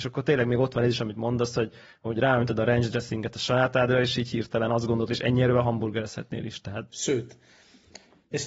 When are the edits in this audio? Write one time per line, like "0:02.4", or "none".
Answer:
0:05.1
0:06.9